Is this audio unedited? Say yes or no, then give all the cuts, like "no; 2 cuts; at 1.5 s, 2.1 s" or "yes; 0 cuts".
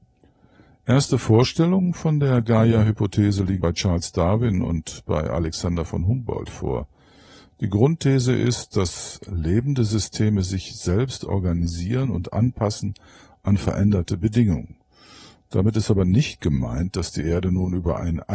no; 1 cut; at 3.6 s